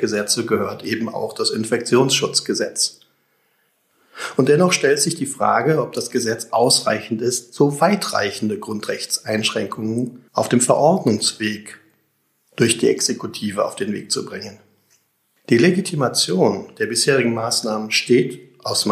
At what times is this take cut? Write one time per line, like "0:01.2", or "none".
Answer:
0:10.3
0:15.4